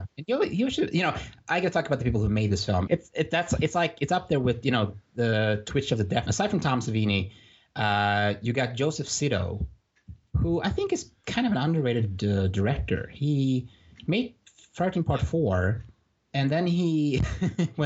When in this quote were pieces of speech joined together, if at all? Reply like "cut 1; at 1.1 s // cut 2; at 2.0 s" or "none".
cut 1; at 2.9 s // cut 2; at 6.3 s